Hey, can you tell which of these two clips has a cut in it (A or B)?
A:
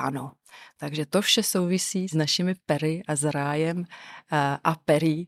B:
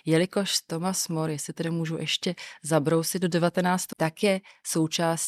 B